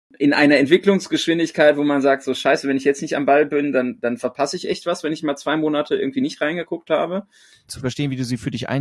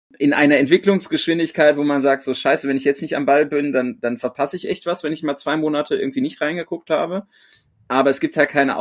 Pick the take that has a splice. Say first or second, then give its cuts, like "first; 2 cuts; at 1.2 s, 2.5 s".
first; 1 cut; at 7.7 s